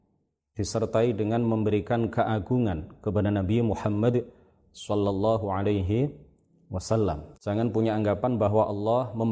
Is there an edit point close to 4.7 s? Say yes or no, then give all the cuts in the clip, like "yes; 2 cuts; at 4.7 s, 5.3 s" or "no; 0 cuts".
no; 1 cut; at 7.3 s